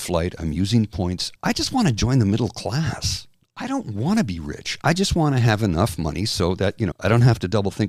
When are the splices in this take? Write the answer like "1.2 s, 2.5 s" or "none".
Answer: 1.3 s, 4.8 s, 6.9 s